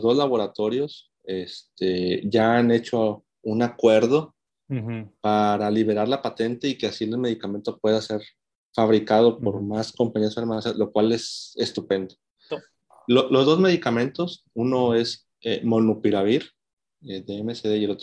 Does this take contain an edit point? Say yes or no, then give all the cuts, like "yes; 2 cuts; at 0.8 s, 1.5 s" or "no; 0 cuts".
yes; 1 cut; at 12.5 s